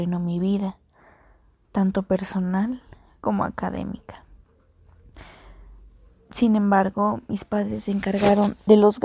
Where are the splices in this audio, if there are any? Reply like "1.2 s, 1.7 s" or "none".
none

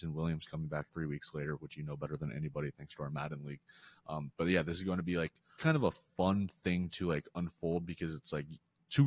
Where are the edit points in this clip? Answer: 5.6 s

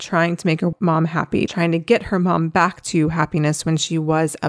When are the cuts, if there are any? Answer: 1.5 s

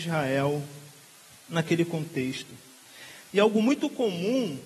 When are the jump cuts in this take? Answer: none

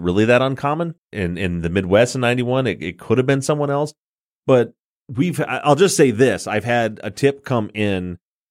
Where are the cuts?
1.0 s

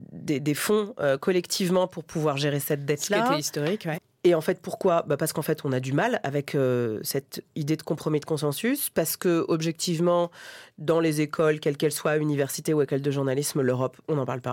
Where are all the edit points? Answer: 3.9 s

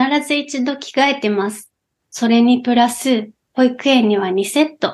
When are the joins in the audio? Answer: 2.0 s

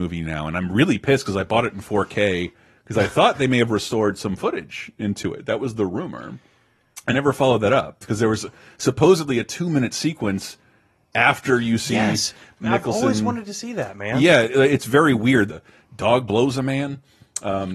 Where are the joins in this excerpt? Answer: 15.5 s

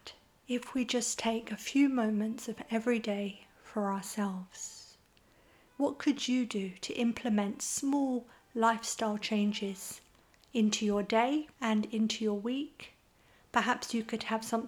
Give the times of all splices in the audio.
5.7 s, 11.5 s

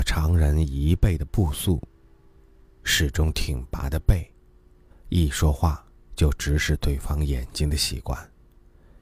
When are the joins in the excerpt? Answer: 4.9 s

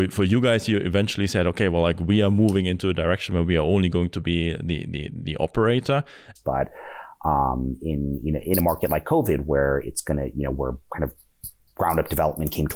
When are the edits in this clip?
6.4 s

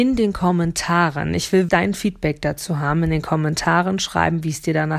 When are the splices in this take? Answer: 1.7 s

